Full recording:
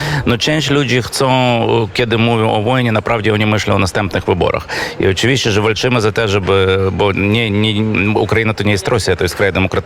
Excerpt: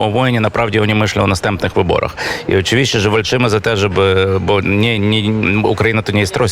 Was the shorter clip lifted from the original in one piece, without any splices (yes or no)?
yes